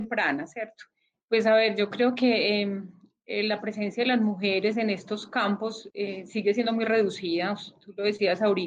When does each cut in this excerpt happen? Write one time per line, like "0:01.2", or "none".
0:01.1